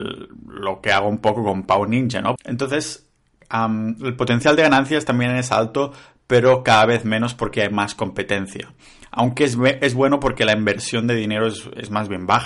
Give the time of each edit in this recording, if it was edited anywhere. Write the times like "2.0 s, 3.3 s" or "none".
2.4 s